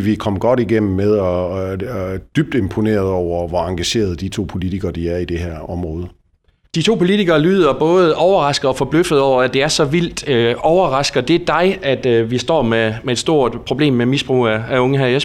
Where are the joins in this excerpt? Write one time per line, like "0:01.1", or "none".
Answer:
none